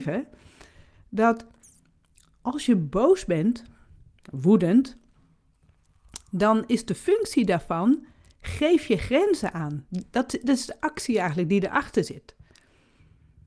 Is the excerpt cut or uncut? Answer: uncut